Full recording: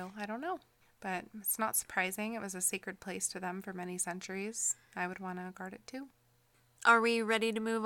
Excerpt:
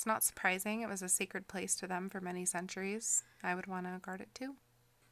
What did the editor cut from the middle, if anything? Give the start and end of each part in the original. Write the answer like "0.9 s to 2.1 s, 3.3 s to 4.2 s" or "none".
none

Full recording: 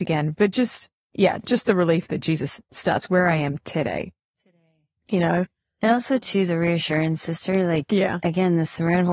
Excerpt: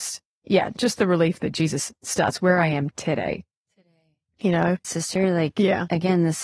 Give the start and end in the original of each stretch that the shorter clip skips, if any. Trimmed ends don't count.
5.5 s to 7.2 s

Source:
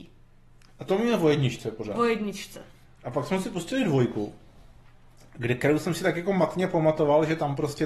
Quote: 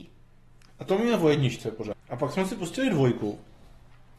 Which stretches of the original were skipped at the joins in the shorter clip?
1.9 s to 2.9 s

